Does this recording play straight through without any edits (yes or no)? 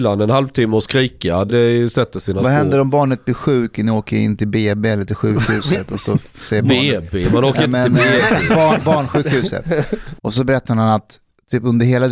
no